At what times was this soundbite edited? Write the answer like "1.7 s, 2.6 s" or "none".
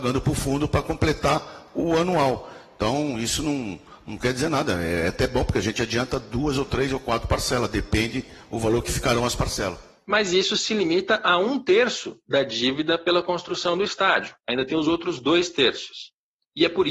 none